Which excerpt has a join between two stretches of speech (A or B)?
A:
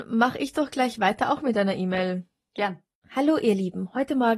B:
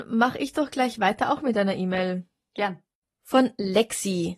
A